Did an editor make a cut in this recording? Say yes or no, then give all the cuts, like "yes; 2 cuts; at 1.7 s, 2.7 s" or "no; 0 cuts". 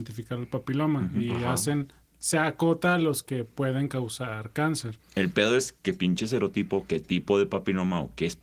yes; 1 cut; at 5.0 s